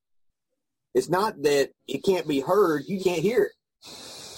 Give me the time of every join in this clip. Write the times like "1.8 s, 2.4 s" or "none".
1.8 s, 3.0 s